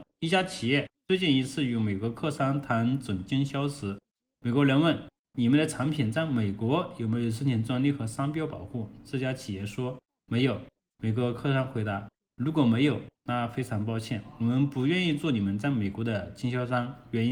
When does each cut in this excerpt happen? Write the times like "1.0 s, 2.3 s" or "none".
none